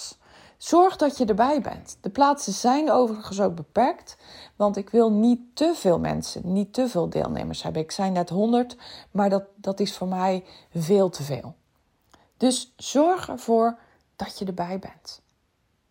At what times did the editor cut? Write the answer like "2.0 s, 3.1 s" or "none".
none